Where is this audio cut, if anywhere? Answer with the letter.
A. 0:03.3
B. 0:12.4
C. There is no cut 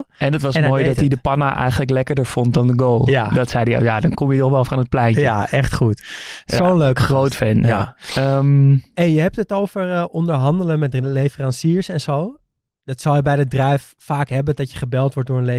C